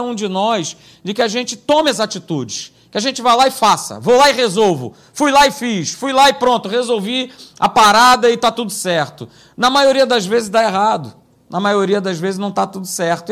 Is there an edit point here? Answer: no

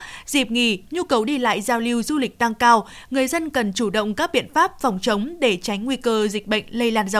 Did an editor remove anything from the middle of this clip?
no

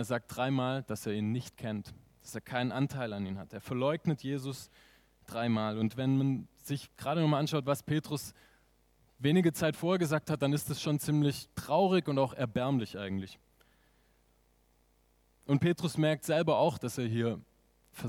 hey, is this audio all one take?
yes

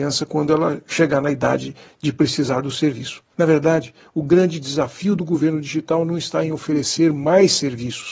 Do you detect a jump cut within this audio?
no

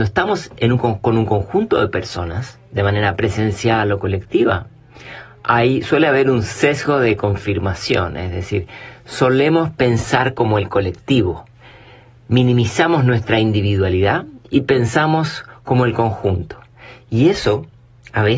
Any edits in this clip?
no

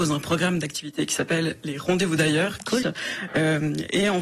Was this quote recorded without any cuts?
no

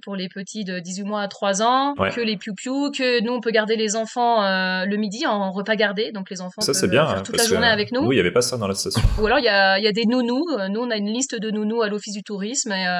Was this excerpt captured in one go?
yes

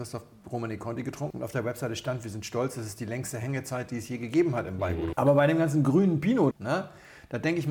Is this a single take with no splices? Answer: no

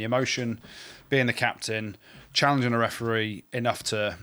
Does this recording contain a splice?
no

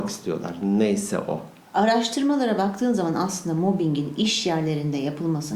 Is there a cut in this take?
yes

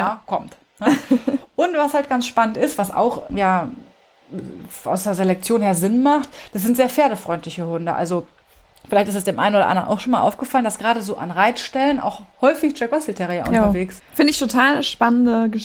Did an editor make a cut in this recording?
yes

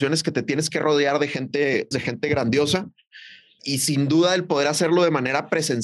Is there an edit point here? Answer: yes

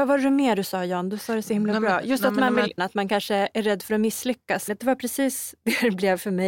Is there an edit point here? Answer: yes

